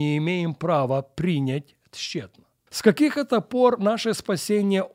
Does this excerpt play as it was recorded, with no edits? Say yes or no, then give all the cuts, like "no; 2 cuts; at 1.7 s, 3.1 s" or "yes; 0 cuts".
no; 1 cut; at 2.7 s